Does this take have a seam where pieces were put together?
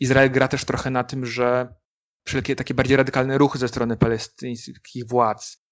no; 0 cuts

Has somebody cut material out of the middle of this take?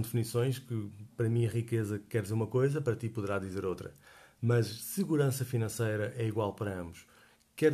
no; 0 cuts

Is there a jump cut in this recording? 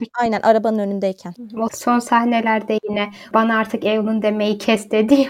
yes; 1 cut; at 1.6 s

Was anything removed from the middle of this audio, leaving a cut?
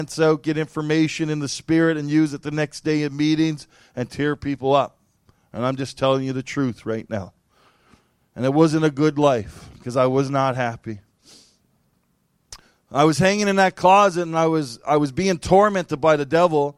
yes; 1 cut; at 12.7 s

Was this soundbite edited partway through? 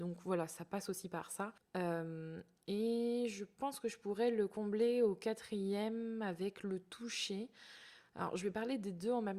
yes; 1 cut; at 1.6 s

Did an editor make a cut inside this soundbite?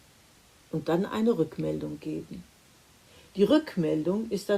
no; 0 cuts

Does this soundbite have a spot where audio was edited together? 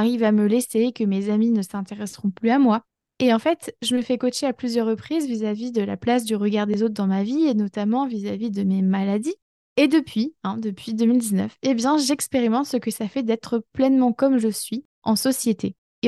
no; 0 cuts

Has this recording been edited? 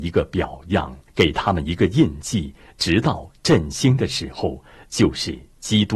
yes; 1 cut; at 1.1 s

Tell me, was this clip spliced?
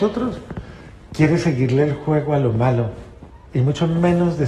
no; 0 cuts

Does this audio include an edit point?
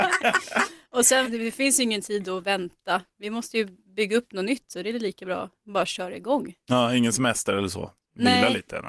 yes; 1 cut; at 1.2 s

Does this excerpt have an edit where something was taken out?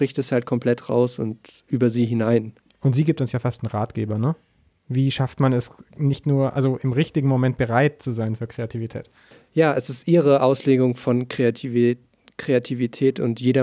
no; 0 cuts

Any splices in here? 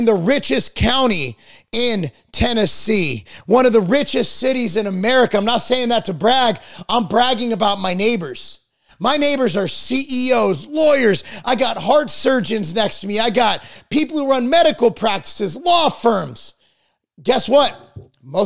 no; 0 cuts

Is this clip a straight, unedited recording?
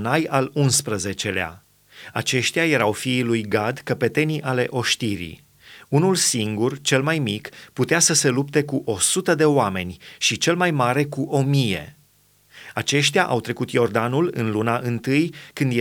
yes; 0 cuts

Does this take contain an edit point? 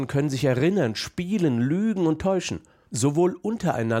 yes; 1 cut; at 2.9 s

